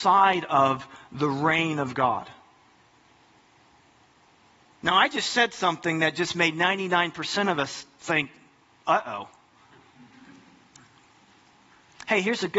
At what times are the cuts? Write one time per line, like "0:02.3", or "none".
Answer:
none